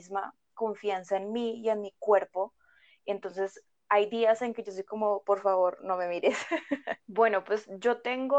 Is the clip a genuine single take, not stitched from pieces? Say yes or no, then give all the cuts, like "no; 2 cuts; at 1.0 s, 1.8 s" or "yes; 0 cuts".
no; 1 cut; at 7.0 s